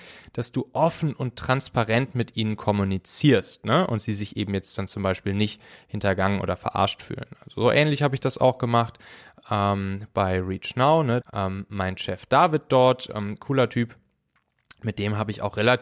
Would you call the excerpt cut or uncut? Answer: cut